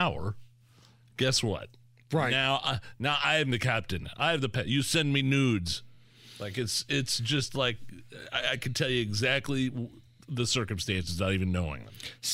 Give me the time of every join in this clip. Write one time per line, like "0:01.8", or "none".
none